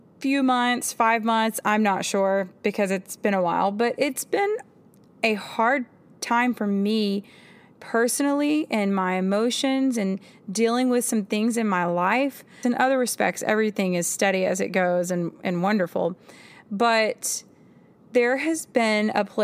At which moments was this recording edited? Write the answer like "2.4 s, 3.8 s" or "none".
12.6 s